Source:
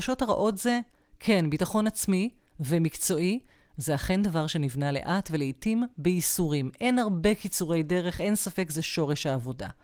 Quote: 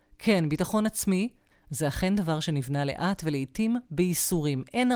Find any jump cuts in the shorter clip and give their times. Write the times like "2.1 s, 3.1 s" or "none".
1.5 s